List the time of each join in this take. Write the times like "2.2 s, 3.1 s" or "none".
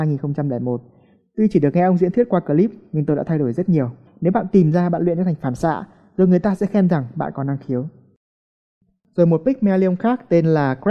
4.1 s